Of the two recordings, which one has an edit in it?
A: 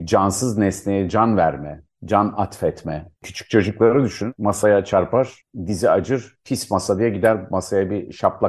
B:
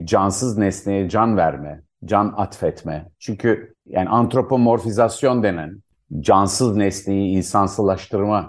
B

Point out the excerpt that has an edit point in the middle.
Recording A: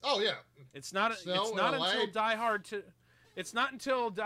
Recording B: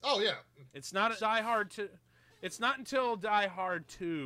B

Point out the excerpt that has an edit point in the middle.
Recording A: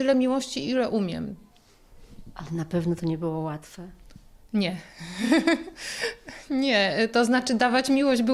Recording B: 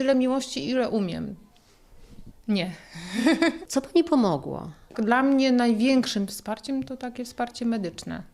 B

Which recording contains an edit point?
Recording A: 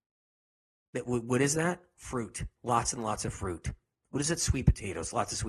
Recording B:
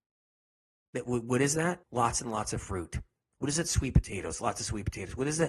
B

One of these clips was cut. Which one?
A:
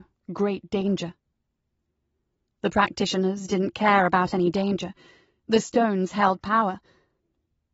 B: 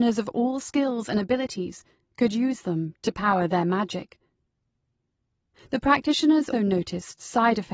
B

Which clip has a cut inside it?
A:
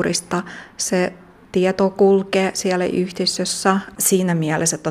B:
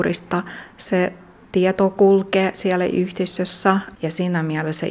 B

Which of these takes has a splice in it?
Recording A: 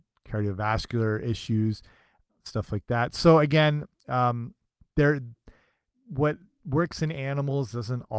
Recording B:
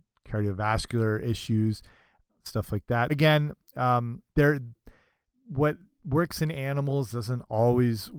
B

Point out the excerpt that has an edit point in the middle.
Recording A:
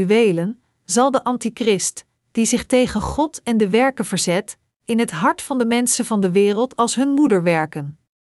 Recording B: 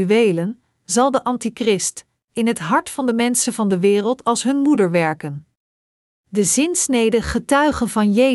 B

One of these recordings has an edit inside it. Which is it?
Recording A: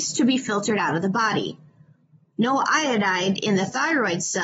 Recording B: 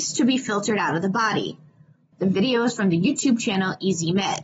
B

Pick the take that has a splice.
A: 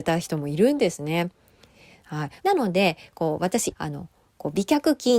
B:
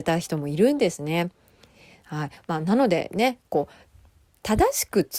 A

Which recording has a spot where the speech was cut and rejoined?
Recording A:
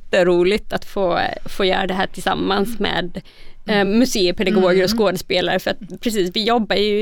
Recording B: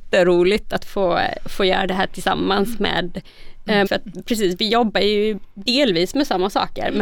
B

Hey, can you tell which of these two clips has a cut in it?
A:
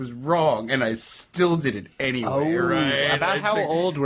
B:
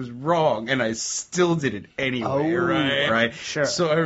B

